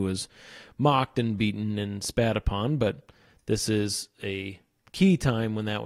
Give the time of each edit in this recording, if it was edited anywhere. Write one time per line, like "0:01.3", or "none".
none